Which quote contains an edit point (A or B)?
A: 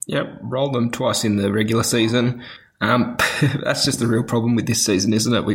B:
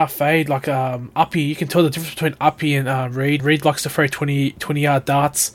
B